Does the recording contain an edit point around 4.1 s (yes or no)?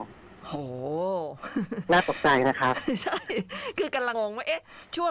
yes